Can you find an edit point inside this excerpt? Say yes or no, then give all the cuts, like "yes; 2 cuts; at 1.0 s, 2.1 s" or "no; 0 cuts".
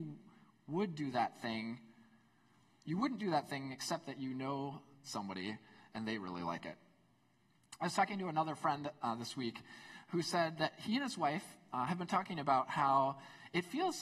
no; 0 cuts